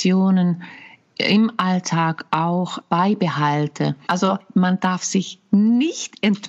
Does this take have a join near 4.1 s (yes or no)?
yes